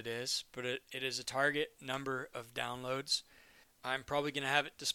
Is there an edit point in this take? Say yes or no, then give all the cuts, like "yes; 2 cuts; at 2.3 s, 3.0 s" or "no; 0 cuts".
yes; 1 cut; at 3.6 s